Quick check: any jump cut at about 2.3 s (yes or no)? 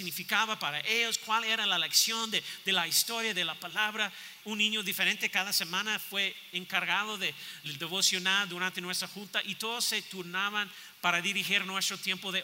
no